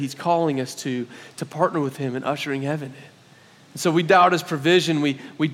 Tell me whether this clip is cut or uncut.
uncut